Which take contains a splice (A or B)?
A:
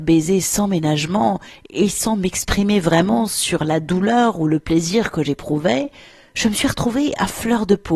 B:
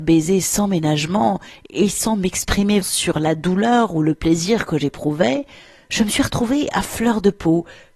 B